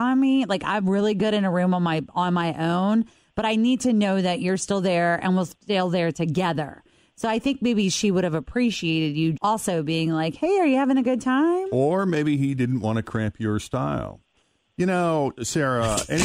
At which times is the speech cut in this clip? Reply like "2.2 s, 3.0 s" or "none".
9.3 s

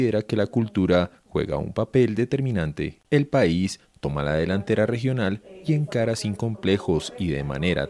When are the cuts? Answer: 3.0 s

